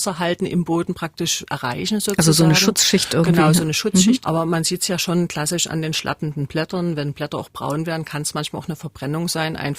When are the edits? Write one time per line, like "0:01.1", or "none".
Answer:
0:04.2